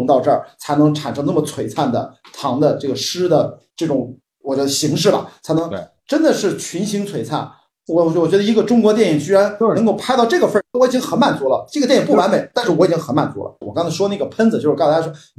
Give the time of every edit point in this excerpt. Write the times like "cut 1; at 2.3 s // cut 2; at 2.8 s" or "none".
cut 1; at 10.7 s // cut 2; at 13.6 s